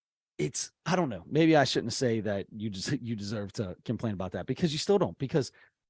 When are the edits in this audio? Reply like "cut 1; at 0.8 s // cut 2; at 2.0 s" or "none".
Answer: none

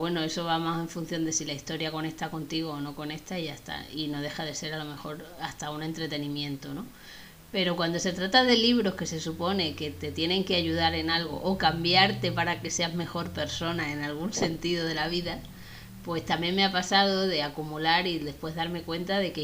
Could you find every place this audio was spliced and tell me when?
none

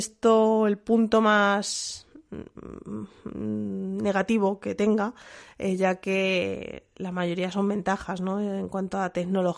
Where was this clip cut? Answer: none

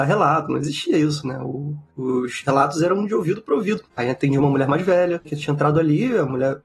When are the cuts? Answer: cut 1; at 3.9 s // cut 2; at 5.2 s

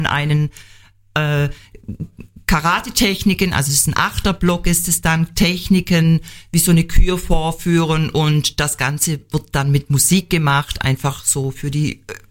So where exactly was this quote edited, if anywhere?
none

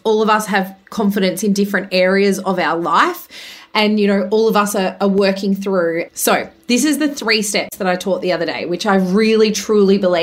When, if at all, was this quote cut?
cut 1; at 6.1 s

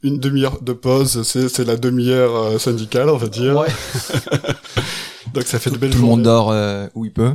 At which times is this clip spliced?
none

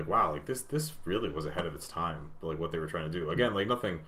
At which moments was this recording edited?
none

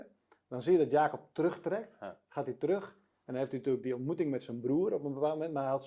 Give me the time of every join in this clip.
none

